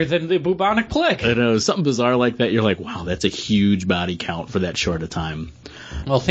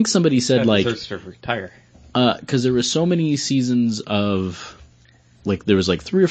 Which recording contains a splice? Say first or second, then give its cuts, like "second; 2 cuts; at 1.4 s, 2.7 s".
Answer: first; 1 cut; at 1.6 s